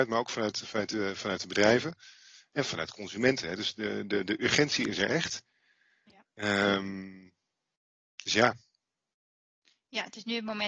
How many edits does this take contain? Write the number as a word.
zero